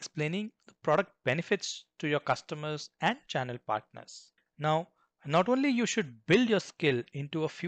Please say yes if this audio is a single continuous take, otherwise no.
no